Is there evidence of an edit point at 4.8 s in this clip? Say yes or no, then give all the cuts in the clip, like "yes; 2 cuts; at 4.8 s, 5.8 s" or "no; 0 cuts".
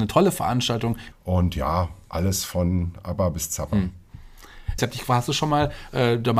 yes; 2 cuts; at 1.1 s, 4.8 s